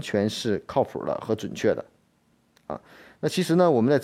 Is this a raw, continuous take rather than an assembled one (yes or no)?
yes